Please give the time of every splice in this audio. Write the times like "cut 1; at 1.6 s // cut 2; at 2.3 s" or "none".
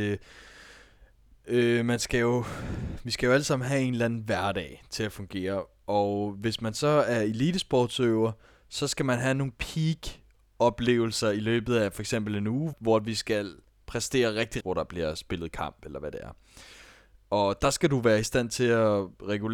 cut 1; at 12.7 s // cut 2; at 14.6 s